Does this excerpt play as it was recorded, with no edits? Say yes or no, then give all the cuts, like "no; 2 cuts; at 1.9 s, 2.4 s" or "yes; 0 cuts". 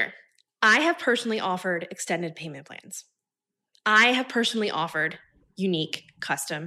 yes; 0 cuts